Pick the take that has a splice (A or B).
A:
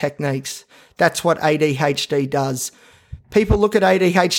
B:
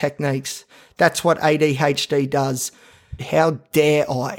B